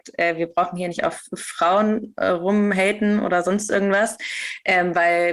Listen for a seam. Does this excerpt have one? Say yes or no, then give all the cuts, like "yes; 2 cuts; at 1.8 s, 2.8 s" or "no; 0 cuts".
no; 0 cuts